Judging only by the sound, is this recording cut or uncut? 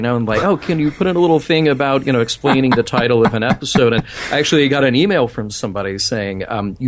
uncut